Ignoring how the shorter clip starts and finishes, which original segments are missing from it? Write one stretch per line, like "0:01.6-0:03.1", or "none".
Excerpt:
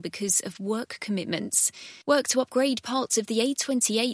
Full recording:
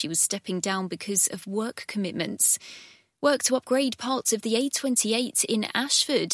0:02.9-0:03.2